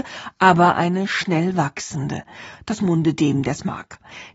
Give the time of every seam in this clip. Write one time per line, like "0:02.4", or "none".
none